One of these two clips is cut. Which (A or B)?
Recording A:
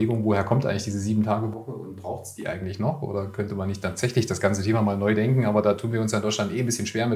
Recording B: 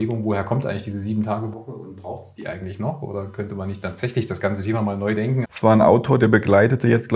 B